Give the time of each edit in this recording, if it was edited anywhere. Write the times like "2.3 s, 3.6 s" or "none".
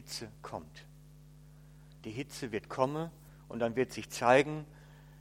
2.0 s